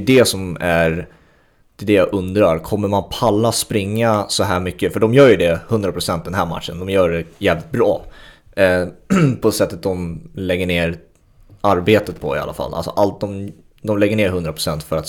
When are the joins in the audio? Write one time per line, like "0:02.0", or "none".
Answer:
none